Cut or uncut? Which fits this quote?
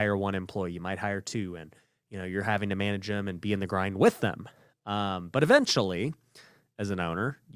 uncut